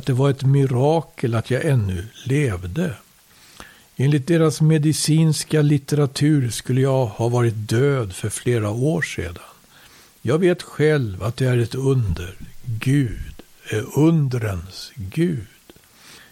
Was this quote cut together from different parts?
no; 0 cuts

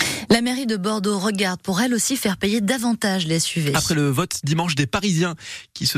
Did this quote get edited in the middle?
no; 0 cuts

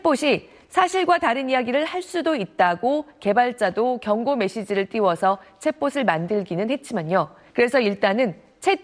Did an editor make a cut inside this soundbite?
yes; 1 cut; at 7.5 s

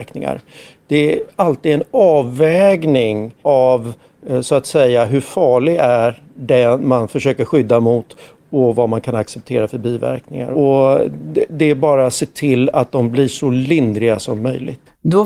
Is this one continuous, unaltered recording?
no; 1 cut; at 3.4 s

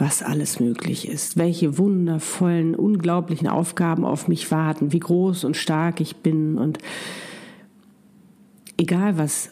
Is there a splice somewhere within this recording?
no; 0 cuts

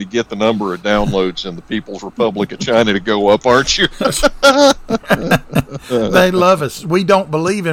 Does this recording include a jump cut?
no; 0 cuts

